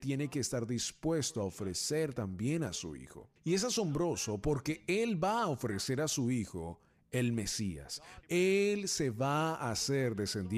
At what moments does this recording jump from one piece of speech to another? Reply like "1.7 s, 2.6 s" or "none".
3.4 s, 8.2 s